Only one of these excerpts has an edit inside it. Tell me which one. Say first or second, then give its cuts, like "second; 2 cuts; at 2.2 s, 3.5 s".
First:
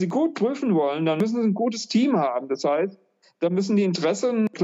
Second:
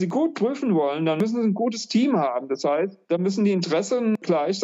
second; 1 cut; at 3.0 s